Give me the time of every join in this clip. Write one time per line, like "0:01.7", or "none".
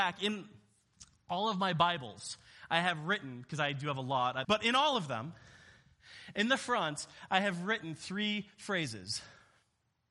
0:04.4